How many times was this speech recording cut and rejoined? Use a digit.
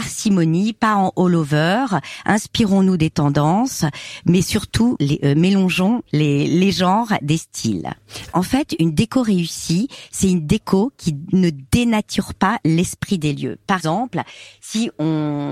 2